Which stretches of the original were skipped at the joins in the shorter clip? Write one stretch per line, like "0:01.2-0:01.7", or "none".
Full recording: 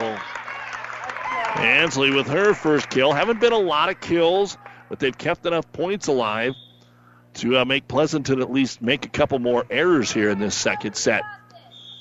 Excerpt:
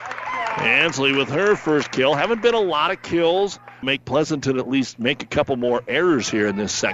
0:04.8-0:07.7

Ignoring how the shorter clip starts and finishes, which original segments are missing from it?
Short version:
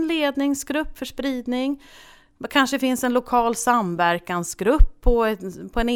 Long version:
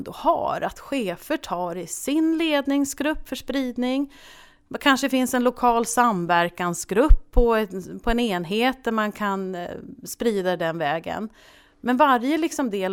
none

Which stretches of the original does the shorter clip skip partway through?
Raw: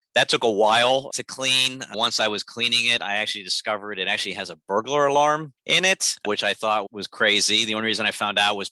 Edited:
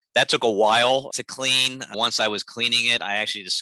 none

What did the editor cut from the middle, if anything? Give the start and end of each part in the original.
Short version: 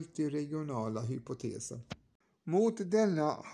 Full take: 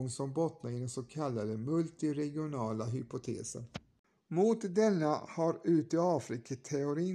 none

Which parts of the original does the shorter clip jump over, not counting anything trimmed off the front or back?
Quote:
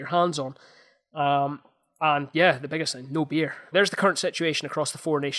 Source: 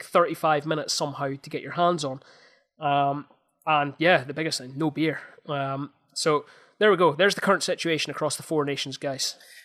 0:05.4-0:07.2

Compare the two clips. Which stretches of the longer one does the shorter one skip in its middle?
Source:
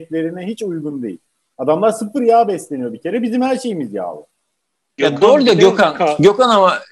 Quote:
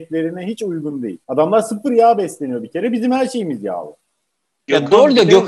0:01.2-0:01.5

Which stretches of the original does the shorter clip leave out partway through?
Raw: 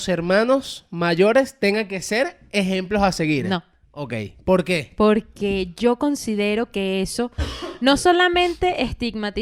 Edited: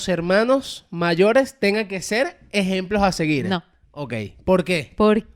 none

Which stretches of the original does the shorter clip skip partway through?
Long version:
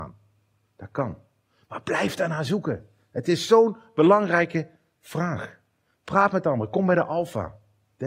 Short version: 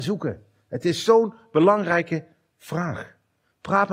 none

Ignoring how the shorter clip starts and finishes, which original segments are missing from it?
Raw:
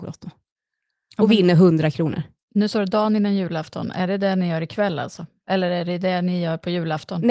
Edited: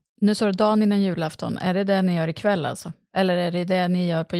none

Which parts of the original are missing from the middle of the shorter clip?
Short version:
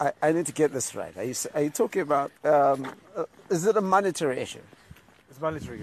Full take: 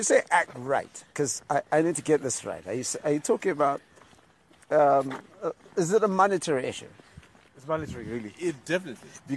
0:03.9-0:04.6

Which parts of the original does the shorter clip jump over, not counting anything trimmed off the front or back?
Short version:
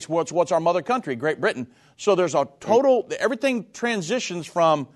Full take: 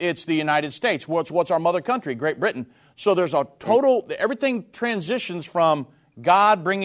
none

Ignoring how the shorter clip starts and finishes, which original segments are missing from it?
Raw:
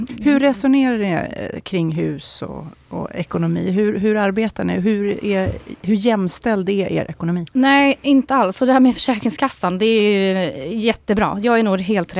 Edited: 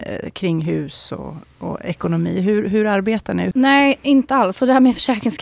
0:04.8-0:07.5

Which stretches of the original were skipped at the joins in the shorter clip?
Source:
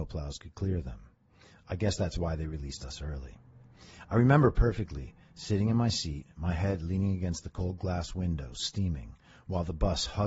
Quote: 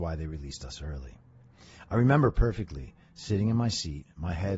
none

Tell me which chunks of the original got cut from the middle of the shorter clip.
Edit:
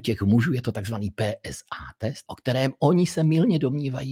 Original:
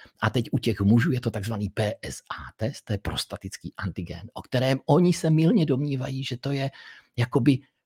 0:02.8-0:04.3

